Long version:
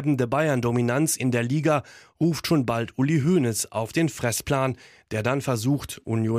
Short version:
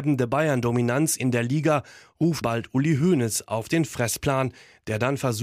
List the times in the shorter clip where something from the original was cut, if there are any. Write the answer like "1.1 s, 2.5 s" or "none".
2.4 s